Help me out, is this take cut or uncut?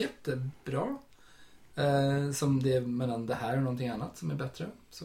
uncut